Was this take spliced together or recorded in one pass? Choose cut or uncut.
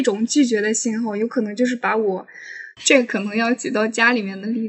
cut